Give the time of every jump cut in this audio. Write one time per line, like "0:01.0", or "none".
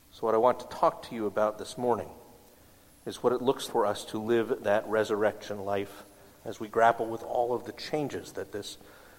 0:03.7
0:06.4